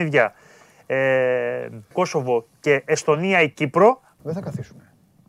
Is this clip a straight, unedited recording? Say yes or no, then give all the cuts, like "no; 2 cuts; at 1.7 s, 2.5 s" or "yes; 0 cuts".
no; 2 cuts; at 1.9 s, 4.2 s